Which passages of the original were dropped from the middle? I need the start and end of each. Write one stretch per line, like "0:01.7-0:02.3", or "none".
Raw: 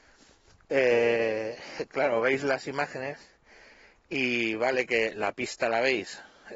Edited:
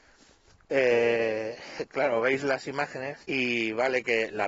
0:03.2-0:04.1